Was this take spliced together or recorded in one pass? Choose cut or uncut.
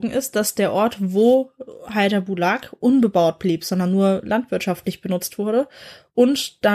uncut